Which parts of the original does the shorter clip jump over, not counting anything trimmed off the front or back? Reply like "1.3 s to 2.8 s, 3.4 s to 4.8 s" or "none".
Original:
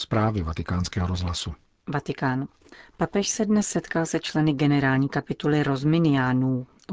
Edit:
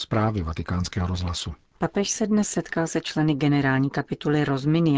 1.7 s to 2.9 s